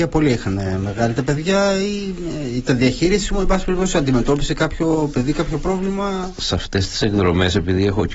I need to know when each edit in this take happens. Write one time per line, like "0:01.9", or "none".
none